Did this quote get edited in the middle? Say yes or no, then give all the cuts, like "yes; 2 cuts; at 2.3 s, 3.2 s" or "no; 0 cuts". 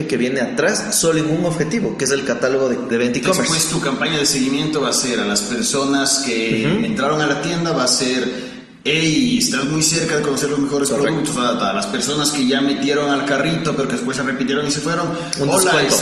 yes; 1 cut; at 2.9 s